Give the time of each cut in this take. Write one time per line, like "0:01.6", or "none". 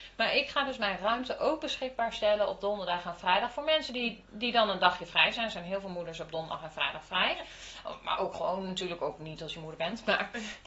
none

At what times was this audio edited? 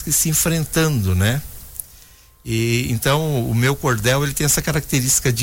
none

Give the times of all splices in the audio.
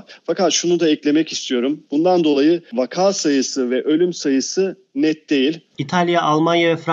0:01.9
0:05.7

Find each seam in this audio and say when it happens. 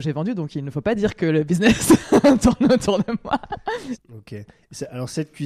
0:04.0

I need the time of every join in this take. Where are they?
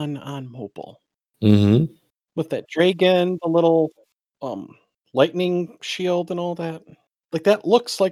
none

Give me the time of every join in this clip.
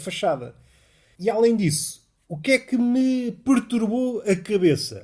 none

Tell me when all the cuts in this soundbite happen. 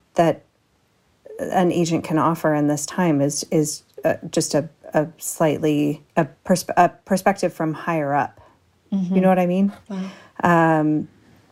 0:06.1
0:09.9

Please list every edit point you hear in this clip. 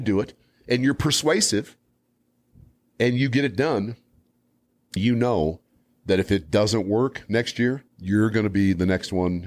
0:05.0
0:07.9

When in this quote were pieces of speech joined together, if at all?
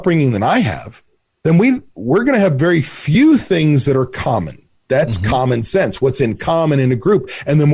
0:04.8

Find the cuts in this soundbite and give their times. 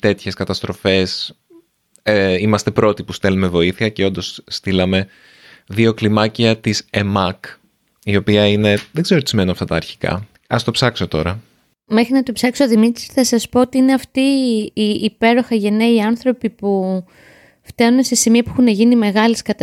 0:10.3

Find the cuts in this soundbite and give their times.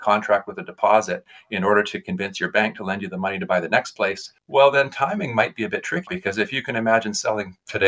0:04.4
0:06.1

